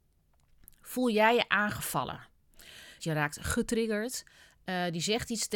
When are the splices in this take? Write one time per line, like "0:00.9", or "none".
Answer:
0:03.0